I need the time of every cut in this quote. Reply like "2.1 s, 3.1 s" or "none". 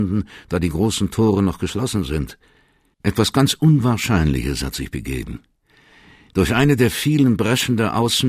2.9 s